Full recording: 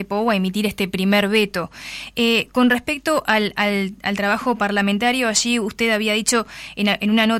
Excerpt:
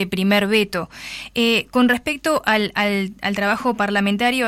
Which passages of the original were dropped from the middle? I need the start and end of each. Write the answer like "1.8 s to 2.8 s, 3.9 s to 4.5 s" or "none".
none